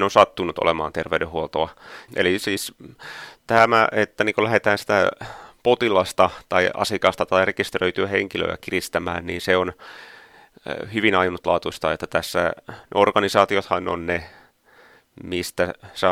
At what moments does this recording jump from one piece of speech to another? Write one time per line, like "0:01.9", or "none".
0:02.1